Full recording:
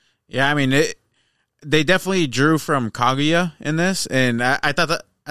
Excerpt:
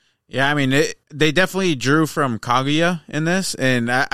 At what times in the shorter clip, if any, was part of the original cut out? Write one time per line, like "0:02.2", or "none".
0:01.0